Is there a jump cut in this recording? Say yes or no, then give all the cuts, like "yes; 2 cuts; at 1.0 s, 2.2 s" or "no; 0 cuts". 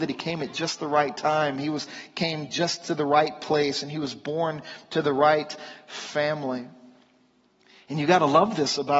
no; 0 cuts